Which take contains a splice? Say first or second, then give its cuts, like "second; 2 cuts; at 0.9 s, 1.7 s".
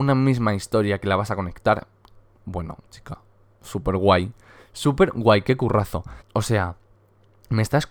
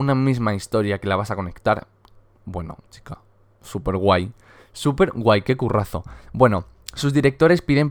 first; 1 cut; at 6.2 s